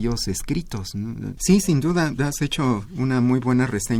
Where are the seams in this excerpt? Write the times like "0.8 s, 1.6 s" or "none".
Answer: 1.4 s